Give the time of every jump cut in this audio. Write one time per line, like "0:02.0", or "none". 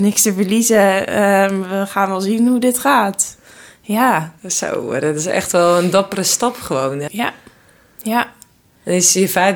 0:04.4
0:07.1